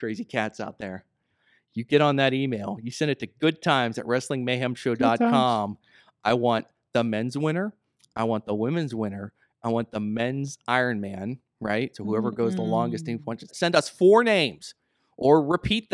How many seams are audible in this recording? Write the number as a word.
two